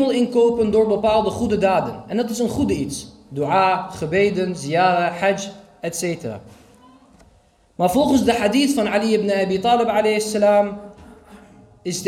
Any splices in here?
no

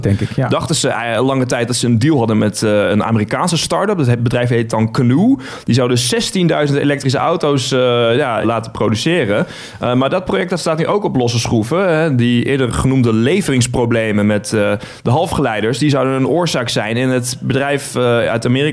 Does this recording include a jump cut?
yes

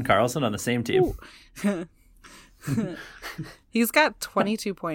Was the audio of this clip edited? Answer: no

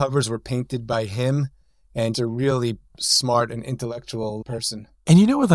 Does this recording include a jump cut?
yes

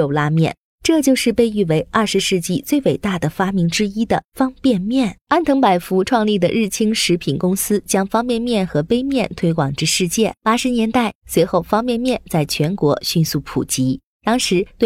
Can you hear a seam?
yes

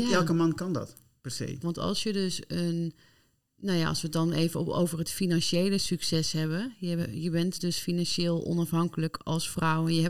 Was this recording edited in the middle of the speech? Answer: yes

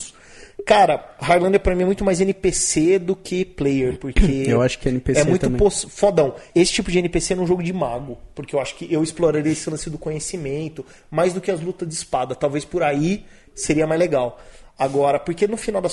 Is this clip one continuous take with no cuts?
no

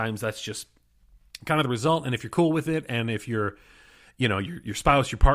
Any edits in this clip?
no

